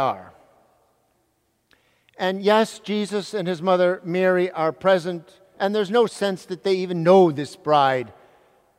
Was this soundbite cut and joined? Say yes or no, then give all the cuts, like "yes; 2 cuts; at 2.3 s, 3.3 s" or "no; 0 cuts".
yes; 1 cut; at 5.5 s